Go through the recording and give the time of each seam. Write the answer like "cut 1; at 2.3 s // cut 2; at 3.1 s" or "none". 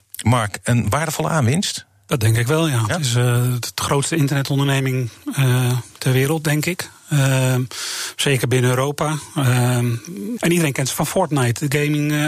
cut 1; at 10.4 s